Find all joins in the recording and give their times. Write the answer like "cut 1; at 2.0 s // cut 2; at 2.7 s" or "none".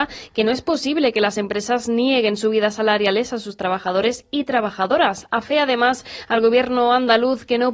none